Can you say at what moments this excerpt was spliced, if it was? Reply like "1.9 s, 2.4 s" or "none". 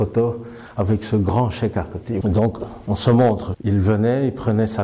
2.2 s, 3.5 s